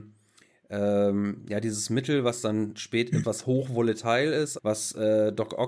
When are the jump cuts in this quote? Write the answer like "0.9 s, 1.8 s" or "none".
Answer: 3.2 s, 4.6 s